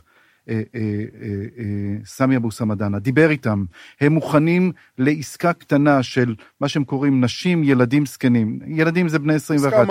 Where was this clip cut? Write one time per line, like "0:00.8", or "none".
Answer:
none

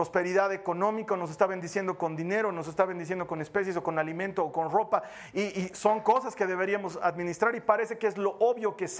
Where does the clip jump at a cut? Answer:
none

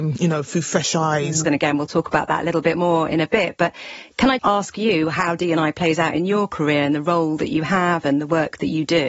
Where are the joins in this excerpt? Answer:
0:01.4
0:04.4

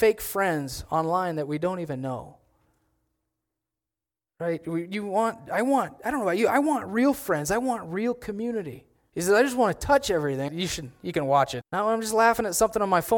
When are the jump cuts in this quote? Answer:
0:09.1
0:10.5
0:11.6

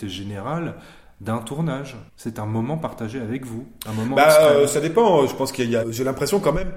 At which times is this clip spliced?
0:02.1
0:05.8

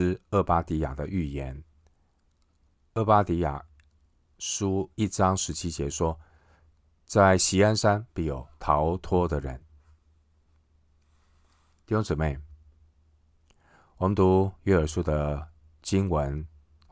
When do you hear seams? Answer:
none

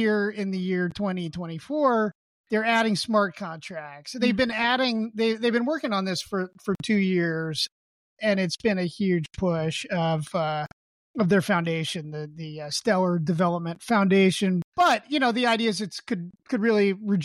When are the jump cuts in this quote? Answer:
0:14.7

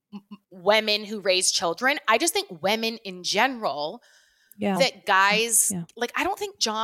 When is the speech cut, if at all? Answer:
0:04.8

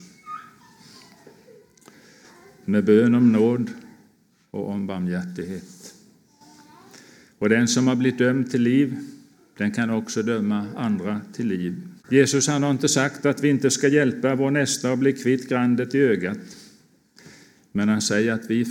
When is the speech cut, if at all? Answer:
0:12.0

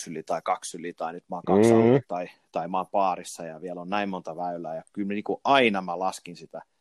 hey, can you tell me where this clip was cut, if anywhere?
none

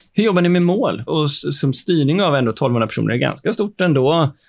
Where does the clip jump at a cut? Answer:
0:01.1

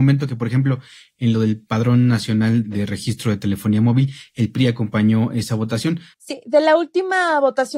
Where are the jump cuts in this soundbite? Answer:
0:06.1

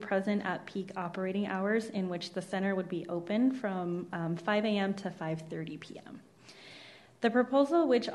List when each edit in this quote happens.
none

